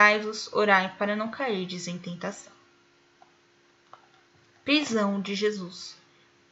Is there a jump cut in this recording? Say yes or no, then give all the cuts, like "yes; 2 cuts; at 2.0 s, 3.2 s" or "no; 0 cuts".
no; 0 cuts